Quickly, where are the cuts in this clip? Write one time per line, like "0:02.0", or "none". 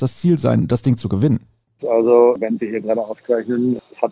0:01.8